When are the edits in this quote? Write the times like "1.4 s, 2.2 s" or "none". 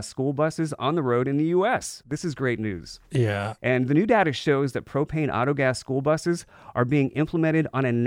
2.0 s, 3.6 s